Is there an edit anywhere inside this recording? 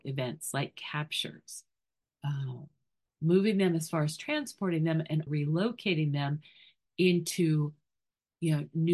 yes; 2 cuts; at 2.1 s, 5.3 s

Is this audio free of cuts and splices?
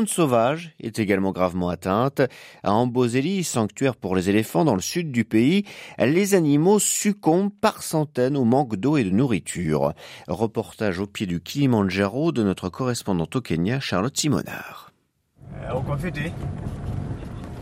yes; 0 cuts

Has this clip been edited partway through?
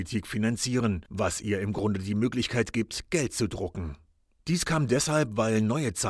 yes; 1 cut; at 1.1 s

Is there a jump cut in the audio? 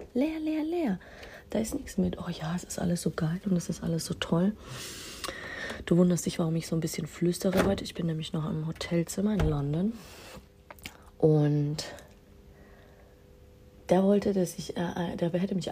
no; 0 cuts

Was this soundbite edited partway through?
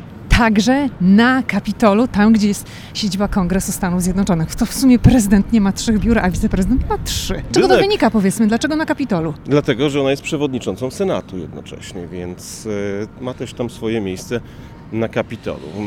yes; 1 cut; at 7.5 s

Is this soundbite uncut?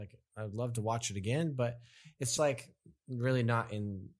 no; 1 cut; at 2.4 s

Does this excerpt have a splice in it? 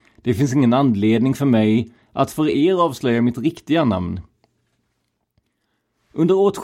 no; 0 cuts

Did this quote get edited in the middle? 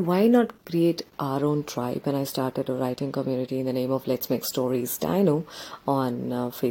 no; 0 cuts

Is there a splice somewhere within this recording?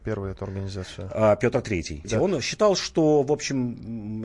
yes; 1 cut; at 2.0 s

